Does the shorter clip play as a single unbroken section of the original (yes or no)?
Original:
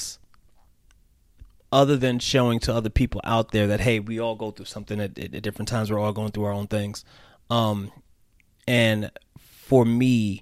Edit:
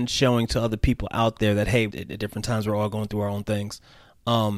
no